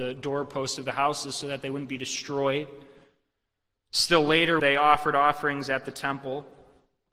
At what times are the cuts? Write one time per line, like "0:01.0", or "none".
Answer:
0:04.6